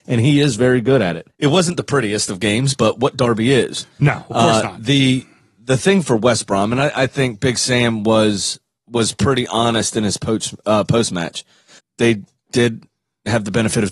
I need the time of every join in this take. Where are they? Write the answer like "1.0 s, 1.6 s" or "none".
11.8 s